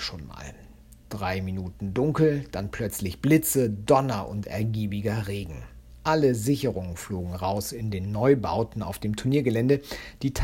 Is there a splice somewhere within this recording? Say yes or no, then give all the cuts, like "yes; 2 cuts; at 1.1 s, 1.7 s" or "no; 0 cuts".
no; 0 cuts